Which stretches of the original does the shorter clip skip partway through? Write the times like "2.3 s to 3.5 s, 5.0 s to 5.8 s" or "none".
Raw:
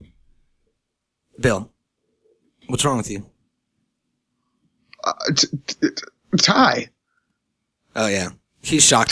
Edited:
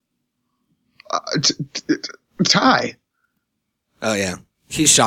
none